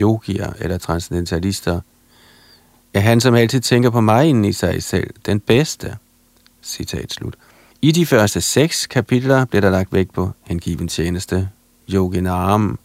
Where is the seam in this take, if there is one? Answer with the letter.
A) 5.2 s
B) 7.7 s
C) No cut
B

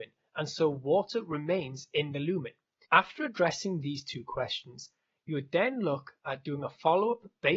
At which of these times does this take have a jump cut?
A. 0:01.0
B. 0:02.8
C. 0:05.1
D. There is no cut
B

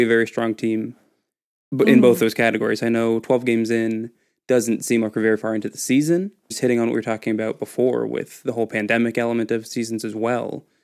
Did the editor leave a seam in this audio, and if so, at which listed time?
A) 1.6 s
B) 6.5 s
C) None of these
B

